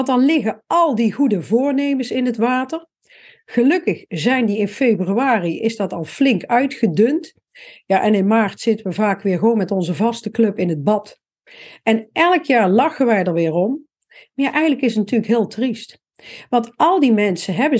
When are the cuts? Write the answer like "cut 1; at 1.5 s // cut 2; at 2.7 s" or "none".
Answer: none